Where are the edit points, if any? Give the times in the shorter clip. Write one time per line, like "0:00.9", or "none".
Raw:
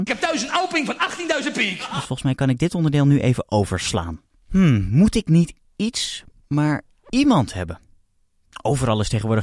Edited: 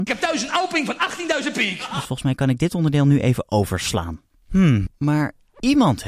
0:04.9